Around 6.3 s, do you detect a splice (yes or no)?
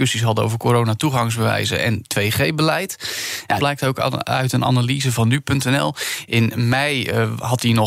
no